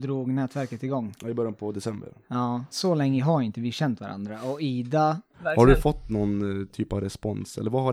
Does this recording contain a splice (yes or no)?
yes